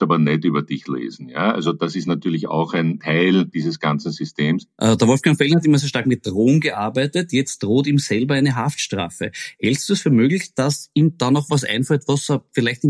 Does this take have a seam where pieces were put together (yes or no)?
no